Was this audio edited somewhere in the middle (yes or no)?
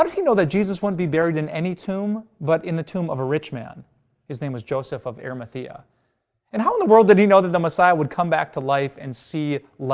no